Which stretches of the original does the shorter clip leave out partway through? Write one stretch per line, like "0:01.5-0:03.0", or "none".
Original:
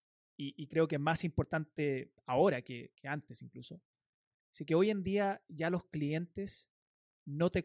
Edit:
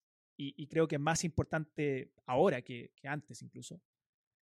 none